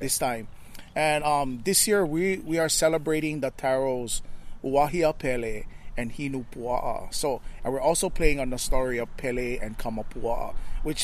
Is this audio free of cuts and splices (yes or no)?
yes